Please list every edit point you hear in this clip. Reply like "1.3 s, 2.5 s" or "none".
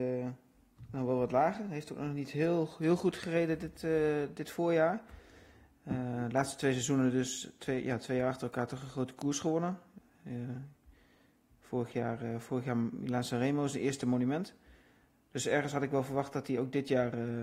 none